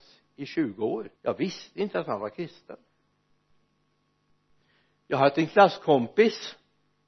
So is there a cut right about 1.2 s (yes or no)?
yes